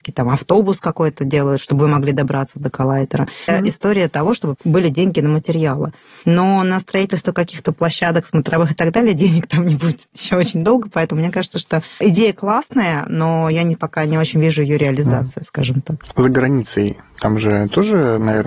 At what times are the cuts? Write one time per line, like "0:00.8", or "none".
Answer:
0:03.5
0:04.6
0:16.1